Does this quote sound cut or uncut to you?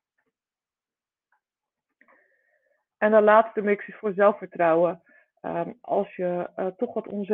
uncut